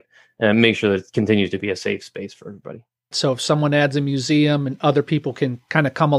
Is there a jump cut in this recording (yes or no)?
yes